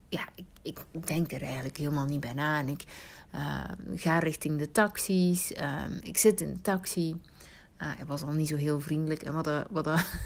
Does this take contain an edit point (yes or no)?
no